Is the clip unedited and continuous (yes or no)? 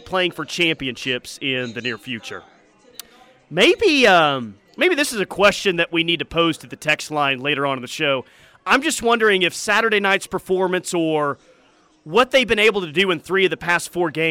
yes